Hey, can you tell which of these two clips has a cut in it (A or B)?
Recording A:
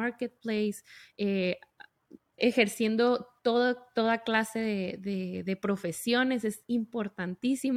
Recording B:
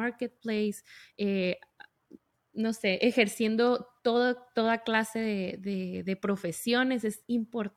A